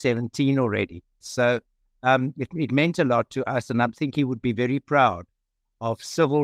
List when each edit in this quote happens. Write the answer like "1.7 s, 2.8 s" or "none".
1.2 s